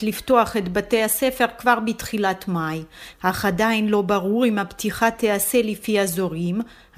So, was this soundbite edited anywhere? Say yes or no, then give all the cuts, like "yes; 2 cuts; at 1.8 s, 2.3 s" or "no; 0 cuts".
yes; 1 cut; at 3.1 s